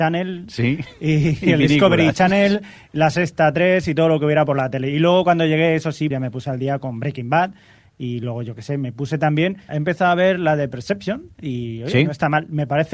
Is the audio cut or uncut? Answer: cut